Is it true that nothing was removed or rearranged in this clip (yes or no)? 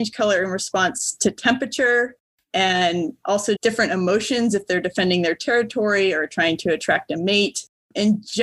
no